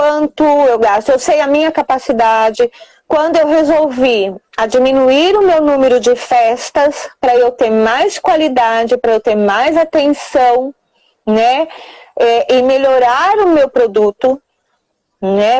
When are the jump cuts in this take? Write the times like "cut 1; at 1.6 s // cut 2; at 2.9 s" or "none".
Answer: none